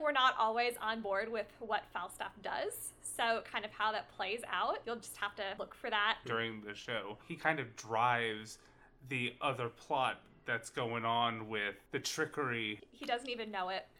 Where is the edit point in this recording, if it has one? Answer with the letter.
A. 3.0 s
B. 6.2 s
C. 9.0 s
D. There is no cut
B